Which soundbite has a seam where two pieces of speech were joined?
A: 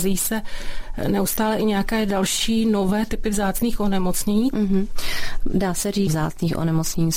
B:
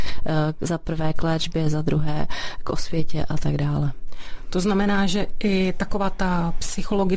A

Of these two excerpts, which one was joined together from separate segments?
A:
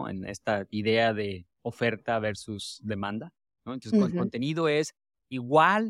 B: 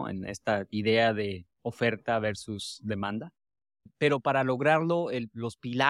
A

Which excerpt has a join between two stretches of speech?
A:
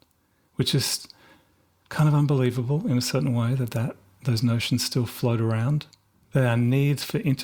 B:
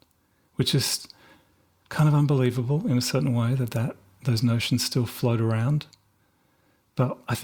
A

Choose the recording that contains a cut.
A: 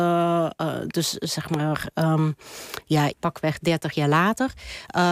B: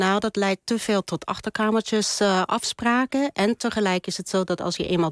A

